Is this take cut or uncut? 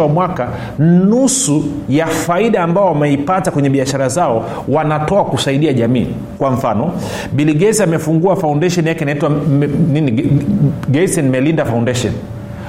uncut